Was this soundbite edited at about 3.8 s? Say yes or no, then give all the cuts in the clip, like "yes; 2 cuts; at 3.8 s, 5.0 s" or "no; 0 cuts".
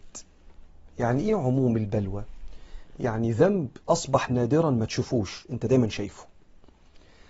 yes; 1 cut; at 3.8 s